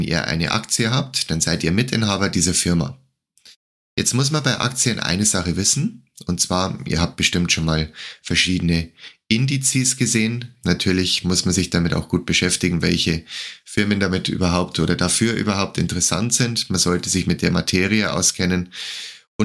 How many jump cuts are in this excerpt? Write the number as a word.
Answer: one